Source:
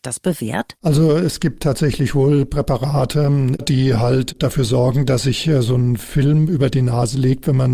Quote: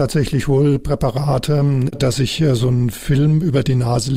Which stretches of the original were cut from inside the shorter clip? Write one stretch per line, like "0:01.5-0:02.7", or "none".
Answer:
0:03.7-0:05.1

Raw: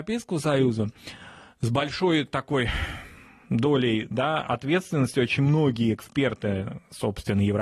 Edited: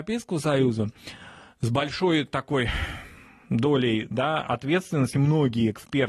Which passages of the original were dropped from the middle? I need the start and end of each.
0:05.1-0:05.4

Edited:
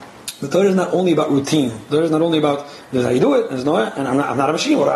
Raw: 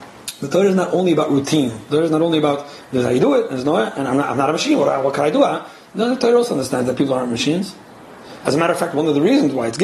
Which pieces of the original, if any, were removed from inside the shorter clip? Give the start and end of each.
none

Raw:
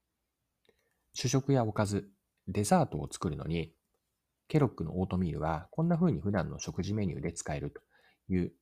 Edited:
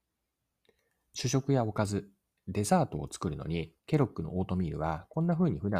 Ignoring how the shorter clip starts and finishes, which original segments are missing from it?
0:03.8-0:04.4

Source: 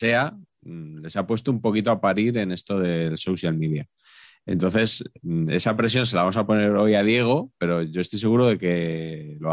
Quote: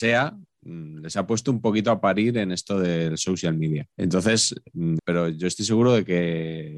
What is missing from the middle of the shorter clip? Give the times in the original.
0:03.9-0:04.4
0:05.5-0:07.5

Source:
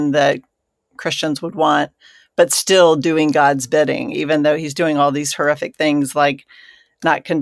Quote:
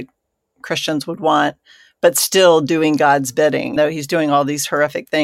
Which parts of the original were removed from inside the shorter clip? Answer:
0:04.1-0:04.4

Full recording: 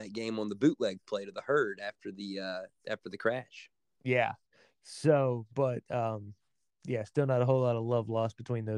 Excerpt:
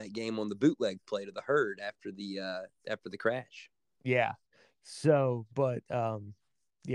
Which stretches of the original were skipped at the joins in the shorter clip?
none

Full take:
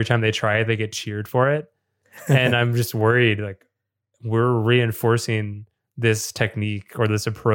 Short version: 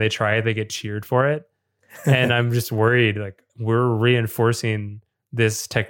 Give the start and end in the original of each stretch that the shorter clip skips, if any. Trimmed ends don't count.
0:03.7-0:04.1

